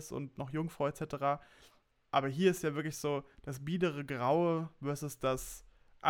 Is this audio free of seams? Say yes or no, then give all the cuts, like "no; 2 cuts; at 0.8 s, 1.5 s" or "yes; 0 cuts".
yes; 0 cuts